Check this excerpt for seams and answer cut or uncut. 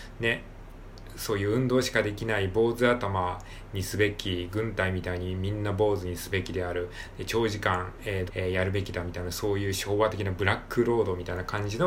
cut